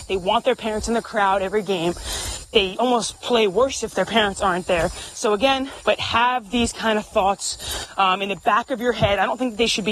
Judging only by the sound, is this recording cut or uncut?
cut